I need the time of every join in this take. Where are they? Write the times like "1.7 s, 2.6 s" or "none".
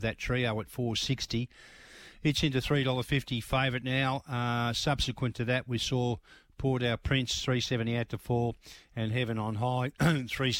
none